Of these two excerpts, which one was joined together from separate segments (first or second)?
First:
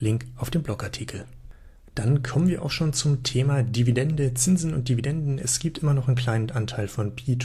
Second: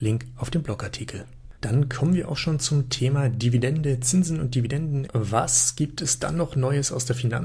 second